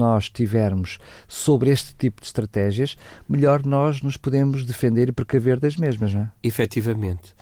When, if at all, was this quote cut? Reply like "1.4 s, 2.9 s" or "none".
none